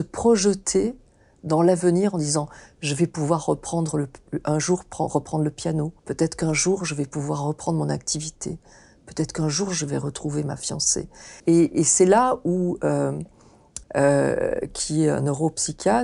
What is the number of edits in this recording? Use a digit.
3